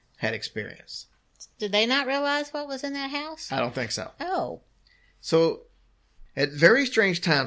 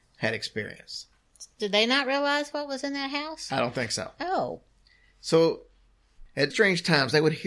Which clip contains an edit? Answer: second; 1 cut; at 6.5 s

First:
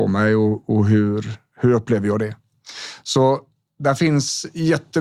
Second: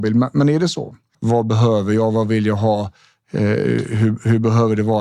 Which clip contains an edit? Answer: second; 1 cut; at 1.1 s

